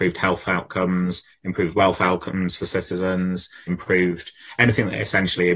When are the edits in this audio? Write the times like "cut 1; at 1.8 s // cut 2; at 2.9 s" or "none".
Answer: cut 1; at 3.7 s